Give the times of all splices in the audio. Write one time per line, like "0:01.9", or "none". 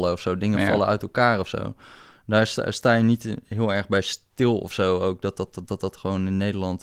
none